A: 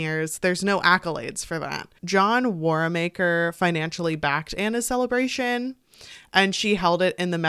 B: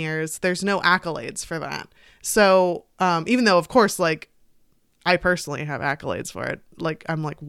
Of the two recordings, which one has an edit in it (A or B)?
A